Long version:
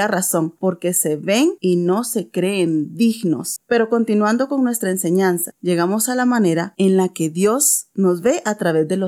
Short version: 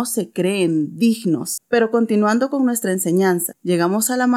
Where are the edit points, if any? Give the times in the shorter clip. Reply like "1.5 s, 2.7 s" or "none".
none